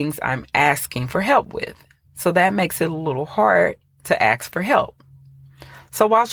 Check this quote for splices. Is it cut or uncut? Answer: uncut